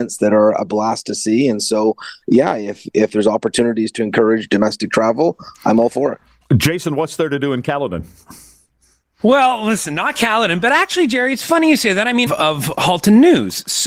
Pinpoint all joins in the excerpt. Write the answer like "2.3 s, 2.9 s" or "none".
12.3 s